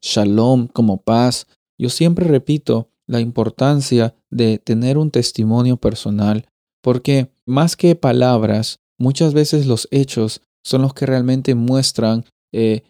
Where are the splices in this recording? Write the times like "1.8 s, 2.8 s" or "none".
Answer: 1.6 s, 7.5 s